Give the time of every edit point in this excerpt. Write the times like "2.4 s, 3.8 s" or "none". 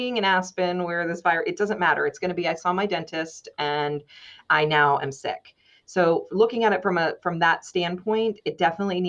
none